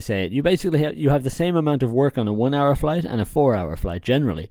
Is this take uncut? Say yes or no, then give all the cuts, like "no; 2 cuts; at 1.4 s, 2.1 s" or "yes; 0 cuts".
yes; 0 cuts